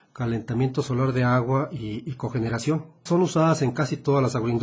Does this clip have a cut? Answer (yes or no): yes